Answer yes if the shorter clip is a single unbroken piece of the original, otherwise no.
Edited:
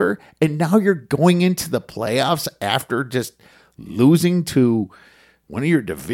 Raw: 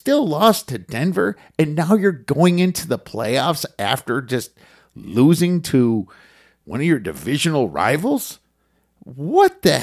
yes